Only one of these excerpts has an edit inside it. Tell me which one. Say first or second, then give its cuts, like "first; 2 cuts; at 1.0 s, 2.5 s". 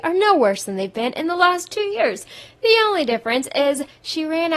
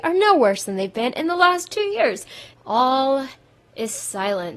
second; 1 cut; at 2.5 s